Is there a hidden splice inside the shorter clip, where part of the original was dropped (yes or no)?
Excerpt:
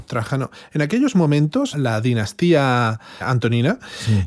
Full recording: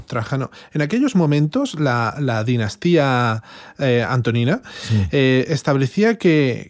yes